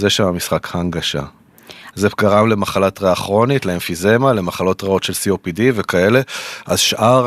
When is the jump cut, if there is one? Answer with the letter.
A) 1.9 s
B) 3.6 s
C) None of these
A